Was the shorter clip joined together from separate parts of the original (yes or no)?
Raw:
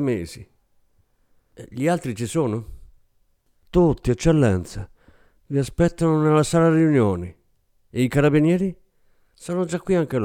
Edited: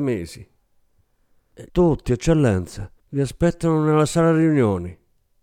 yes